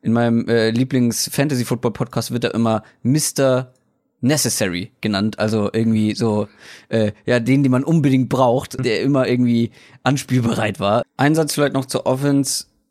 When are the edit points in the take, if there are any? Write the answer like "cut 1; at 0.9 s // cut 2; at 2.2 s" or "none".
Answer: cut 1; at 8.8 s // cut 2; at 11.0 s